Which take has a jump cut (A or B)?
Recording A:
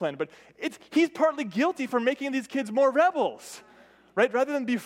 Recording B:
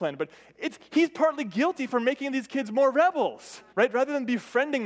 B